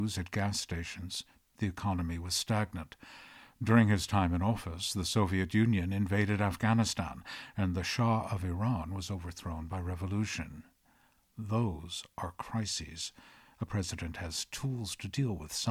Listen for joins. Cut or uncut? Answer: uncut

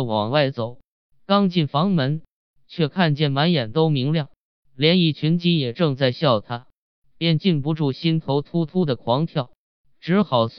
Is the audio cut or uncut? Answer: uncut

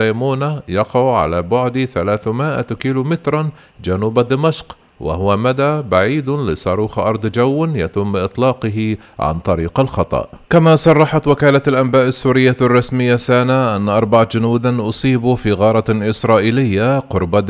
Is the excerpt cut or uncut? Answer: cut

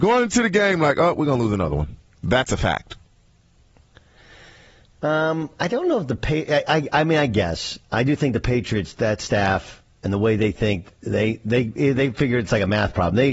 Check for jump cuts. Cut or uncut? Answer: uncut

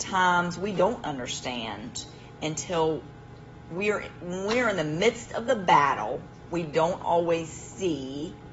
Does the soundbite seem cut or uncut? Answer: uncut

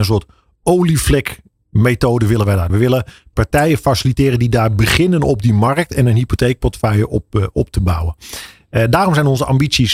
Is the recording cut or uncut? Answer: cut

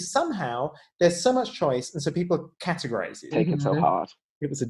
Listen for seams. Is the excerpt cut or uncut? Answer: cut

